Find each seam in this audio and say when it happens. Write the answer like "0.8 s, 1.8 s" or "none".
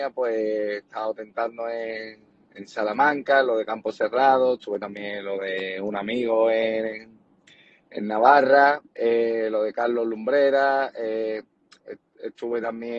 8.9 s